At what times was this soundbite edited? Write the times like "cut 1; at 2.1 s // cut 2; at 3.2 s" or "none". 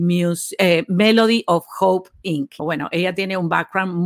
cut 1; at 2.6 s

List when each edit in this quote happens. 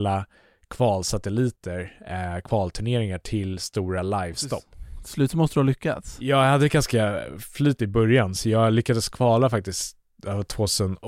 none

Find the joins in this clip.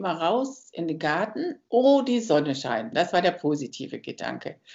cut 1; at 2.9 s

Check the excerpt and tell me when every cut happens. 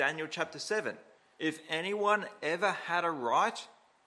cut 1; at 1.4 s

